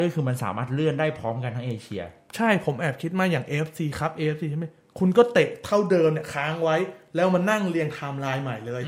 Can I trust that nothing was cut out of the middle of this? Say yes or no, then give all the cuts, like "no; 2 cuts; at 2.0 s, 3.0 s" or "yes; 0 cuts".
yes; 0 cuts